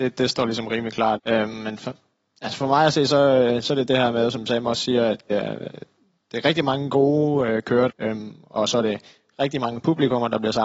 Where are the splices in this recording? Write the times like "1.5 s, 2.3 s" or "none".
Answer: 1.2 s, 5.3 s, 7.9 s